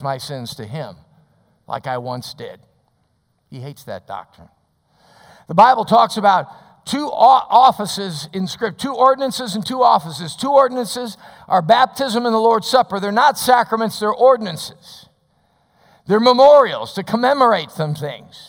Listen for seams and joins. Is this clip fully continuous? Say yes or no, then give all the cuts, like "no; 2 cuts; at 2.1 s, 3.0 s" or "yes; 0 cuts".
no; 1 cut; at 3.4 s